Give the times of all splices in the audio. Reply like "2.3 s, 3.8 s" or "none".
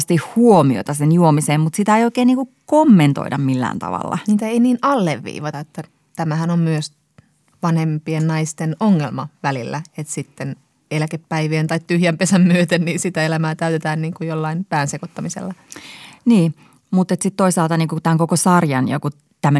5.5 s